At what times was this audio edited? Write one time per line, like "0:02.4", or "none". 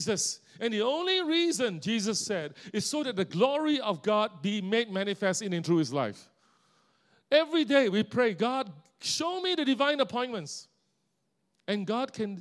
none